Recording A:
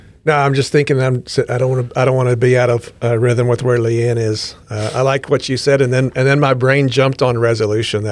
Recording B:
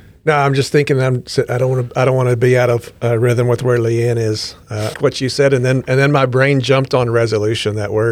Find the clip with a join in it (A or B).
B